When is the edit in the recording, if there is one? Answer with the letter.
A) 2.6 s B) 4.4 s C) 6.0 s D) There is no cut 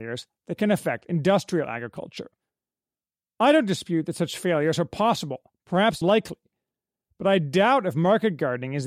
C